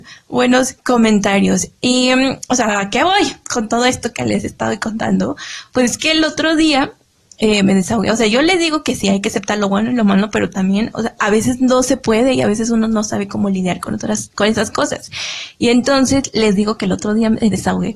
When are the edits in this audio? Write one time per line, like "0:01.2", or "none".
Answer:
none